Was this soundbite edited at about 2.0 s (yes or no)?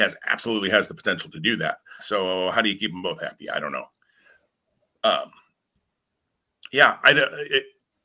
yes